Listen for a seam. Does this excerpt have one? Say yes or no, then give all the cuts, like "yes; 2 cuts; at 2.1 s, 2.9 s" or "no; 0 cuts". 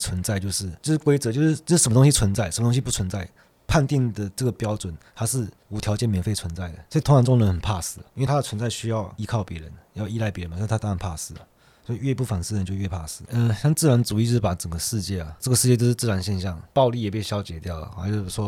no; 0 cuts